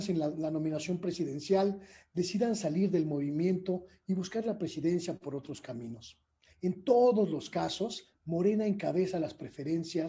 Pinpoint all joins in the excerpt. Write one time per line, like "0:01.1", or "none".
0:06.5
0:08.1